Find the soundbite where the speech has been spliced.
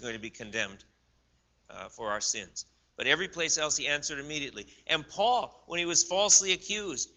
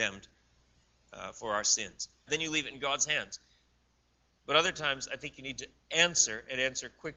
second; 1 cut; at 2.3 s

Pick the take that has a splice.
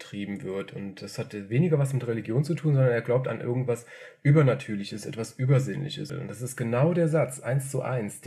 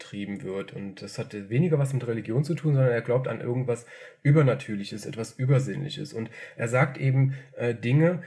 first; 1 cut; at 6.1 s

